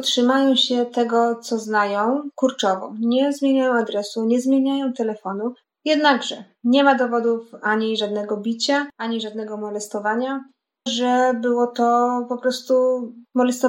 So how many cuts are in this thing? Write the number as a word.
two